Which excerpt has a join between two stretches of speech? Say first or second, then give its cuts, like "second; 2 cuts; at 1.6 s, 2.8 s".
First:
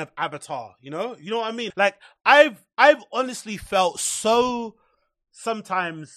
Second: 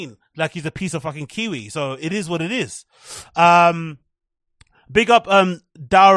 first; 1 cut; at 1.7 s